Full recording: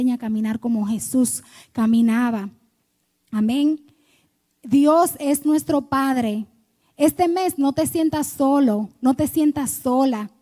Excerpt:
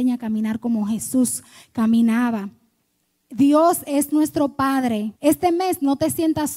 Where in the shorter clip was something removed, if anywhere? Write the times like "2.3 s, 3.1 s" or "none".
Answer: 3.2 s, 5.2 s